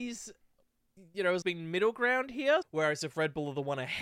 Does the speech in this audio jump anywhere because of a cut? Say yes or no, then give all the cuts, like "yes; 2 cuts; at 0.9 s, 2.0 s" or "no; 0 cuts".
yes; 2 cuts; at 1.4 s, 2.6 s